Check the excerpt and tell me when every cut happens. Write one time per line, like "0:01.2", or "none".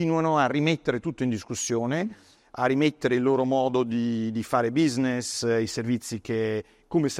none